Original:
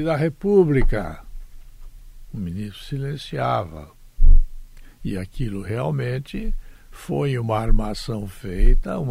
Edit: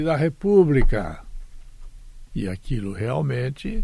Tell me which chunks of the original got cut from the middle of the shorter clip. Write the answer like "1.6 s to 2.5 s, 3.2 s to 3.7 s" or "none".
2.3 s to 5.0 s